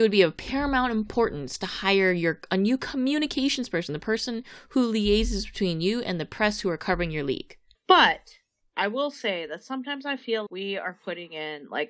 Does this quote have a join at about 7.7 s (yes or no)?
yes